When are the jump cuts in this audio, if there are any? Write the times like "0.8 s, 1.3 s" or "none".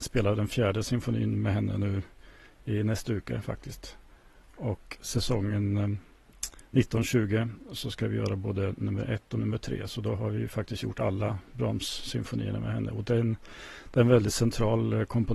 4.9 s

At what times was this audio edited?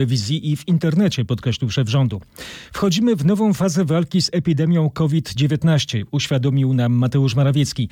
none

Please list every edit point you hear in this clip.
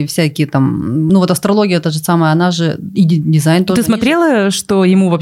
none

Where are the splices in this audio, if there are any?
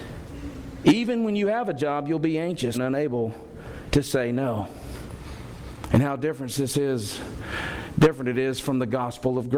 2.7 s

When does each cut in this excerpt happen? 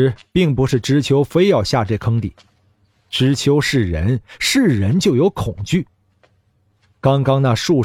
none

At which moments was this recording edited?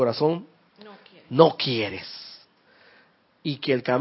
none

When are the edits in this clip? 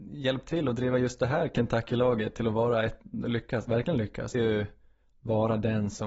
4.3 s

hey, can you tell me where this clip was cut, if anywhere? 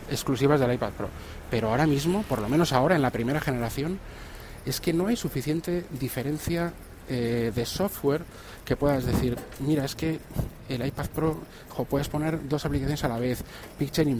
none

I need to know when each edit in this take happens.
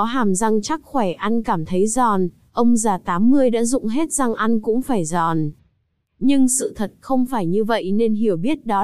none

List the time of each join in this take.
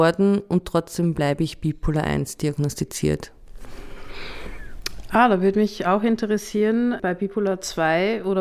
none

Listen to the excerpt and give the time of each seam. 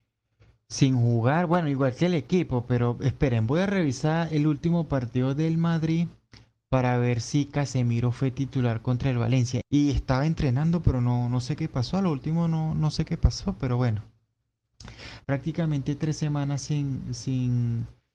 9.6 s, 15.2 s

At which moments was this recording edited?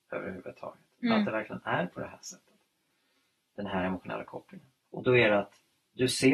4.8 s

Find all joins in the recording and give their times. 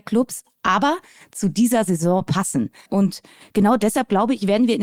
2.9 s

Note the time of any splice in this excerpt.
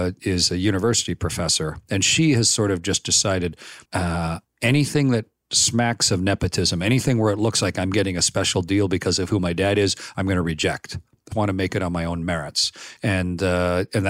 3.8 s, 11.3 s, 13.0 s

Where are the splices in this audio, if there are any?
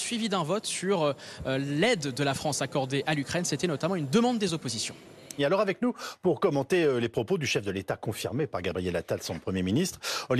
5.4 s

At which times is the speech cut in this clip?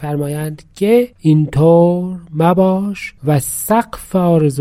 1.1 s, 3.2 s

